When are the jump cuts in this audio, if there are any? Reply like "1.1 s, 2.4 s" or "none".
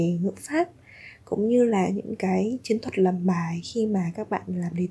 none